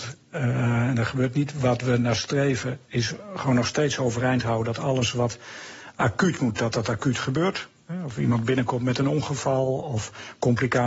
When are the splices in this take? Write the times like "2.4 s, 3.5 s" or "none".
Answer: none